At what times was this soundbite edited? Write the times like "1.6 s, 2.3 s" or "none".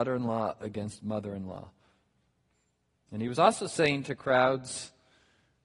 none